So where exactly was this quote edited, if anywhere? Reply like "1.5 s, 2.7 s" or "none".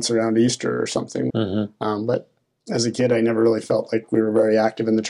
1.3 s